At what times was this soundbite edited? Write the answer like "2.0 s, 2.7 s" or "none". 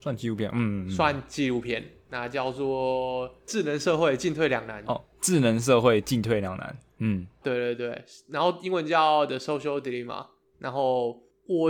none